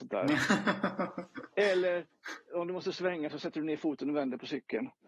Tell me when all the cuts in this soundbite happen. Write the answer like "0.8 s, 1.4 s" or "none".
none